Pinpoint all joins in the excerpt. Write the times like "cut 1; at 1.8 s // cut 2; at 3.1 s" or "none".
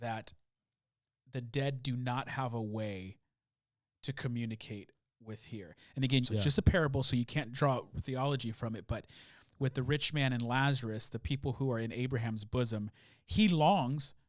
cut 1; at 6.2 s